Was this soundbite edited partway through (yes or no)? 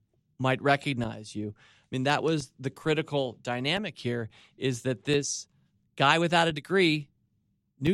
no